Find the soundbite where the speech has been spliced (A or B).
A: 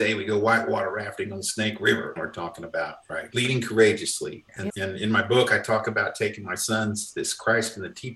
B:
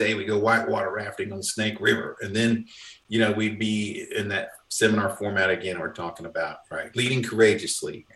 A